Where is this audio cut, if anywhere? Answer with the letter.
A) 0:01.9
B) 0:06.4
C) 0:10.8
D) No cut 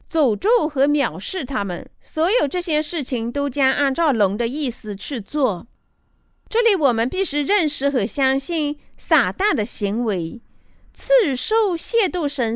A